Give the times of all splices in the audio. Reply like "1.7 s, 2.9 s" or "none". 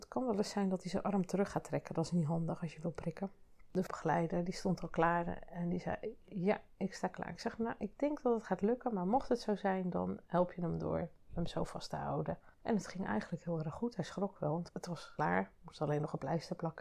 none